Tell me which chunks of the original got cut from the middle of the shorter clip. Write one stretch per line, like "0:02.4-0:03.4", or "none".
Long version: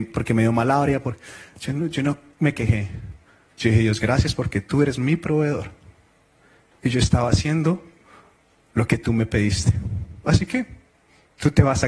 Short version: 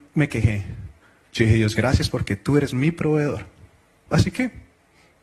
0:06.3-0:10.2